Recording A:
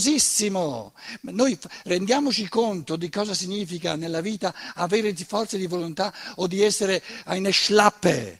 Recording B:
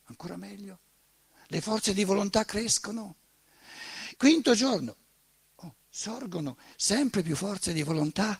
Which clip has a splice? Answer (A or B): B